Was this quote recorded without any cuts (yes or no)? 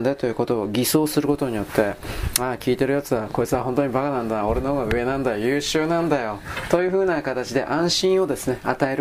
yes